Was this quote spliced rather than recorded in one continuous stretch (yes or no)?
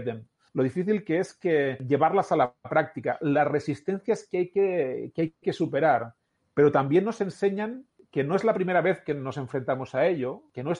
no